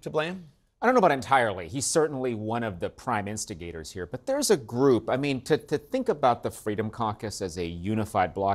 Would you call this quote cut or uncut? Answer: uncut